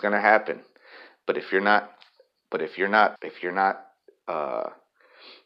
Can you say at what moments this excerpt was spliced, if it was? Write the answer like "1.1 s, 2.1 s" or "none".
3.2 s